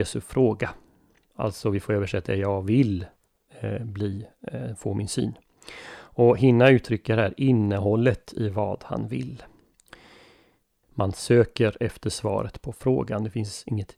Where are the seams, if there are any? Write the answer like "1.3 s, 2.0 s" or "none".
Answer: 10.8 s